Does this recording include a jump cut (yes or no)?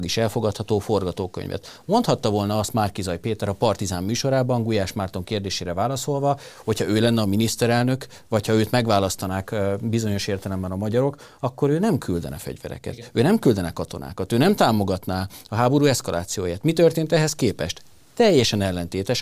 no